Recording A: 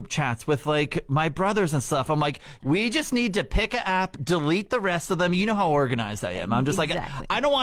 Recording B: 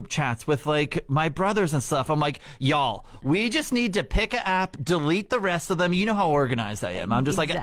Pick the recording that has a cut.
A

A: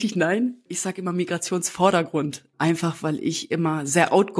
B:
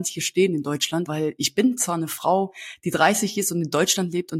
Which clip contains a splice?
B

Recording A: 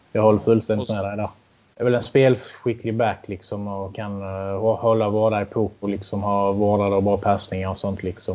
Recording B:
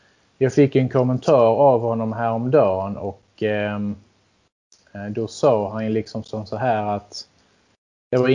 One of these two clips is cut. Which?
A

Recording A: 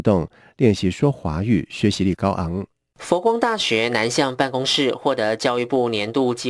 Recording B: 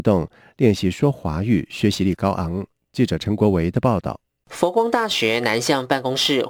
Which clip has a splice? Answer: A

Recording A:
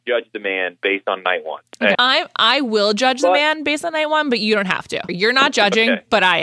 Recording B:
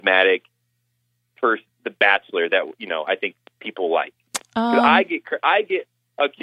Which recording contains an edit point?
A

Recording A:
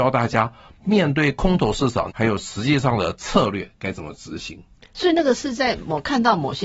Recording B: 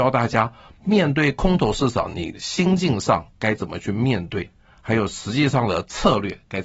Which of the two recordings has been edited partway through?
A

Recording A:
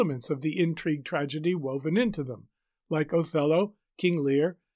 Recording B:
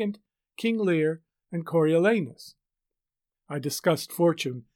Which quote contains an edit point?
B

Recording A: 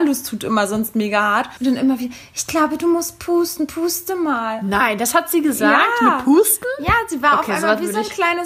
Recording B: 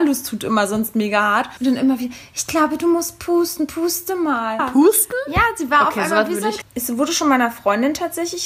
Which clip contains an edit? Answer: B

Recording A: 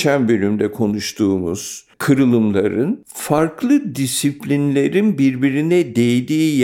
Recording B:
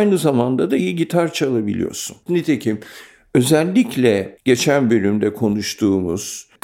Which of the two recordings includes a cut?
B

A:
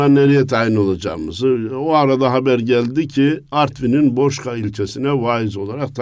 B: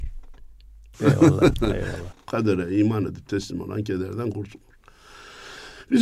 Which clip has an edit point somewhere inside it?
B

